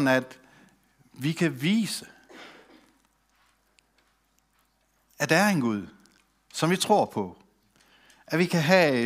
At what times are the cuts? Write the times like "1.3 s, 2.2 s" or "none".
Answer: none